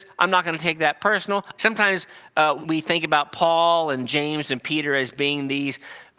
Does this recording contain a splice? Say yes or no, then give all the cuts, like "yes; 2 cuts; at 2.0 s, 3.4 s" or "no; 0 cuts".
yes; 2 cuts; at 1.6 s, 2.6 s